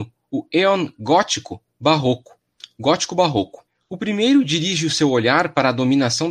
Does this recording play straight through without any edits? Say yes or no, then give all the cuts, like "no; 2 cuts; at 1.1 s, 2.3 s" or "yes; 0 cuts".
yes; 0 cuts